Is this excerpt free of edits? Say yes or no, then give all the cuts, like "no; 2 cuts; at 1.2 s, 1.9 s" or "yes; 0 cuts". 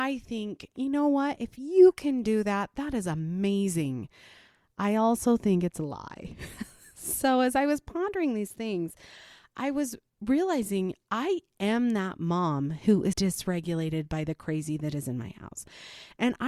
no; 1 cut; at 13.1 s